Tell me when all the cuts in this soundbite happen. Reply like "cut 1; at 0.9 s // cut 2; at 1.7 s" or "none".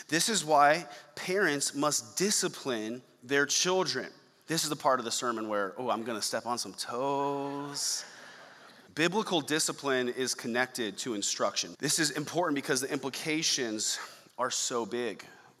cut 1; at 8.9 s // cut 2; at 11.7 s